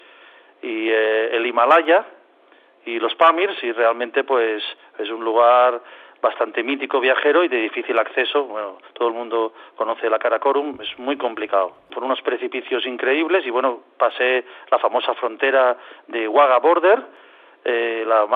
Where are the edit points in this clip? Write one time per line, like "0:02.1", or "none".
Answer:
0:11.9

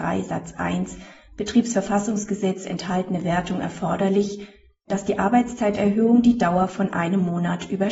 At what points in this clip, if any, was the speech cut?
none

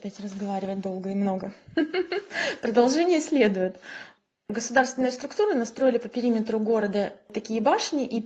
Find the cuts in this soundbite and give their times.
none

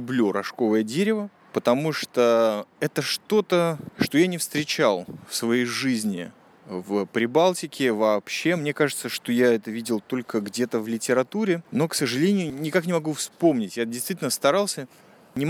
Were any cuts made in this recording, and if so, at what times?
none

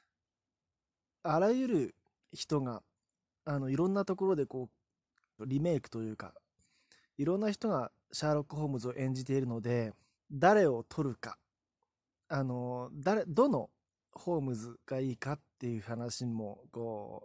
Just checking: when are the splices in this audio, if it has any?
0:05.4
0:10.1

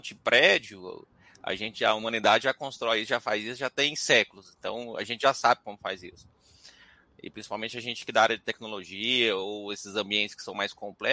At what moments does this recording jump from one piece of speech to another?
none

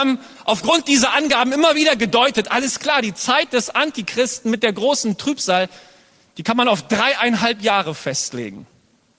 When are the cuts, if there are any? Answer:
none

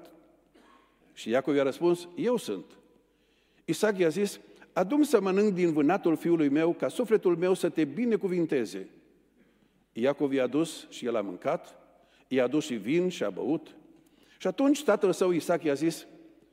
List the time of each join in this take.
0:01.0

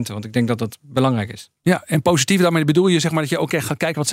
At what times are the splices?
none

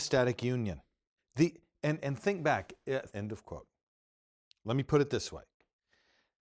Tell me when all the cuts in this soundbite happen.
0:01.2
0:03.1

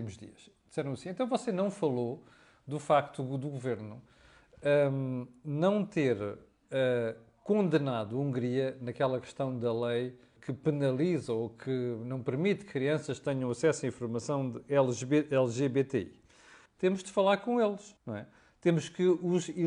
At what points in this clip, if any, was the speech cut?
0:10.4
0:16.7
0:18.0

